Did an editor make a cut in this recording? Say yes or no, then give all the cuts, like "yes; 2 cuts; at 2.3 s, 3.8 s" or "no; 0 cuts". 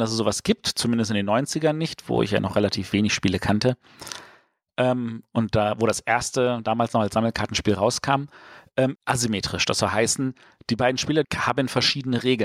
yes; 2 cuts; at 9.0 s, 11.2 s